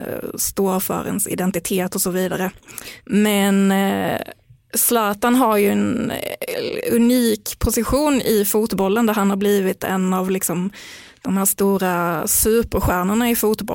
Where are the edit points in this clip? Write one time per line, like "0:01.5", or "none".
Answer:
0:03.0